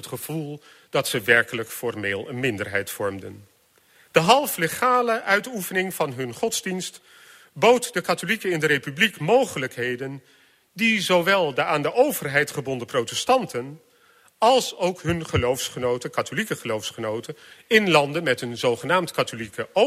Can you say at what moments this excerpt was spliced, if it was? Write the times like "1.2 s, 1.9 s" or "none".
4.1 s